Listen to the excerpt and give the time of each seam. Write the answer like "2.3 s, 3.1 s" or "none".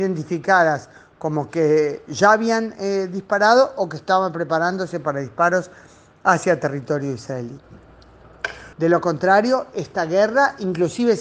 8.7 s